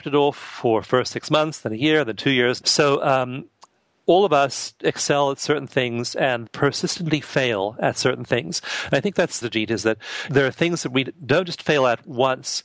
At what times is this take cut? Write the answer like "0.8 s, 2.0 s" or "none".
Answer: 2.6 s, 6.5 s, 9.4 s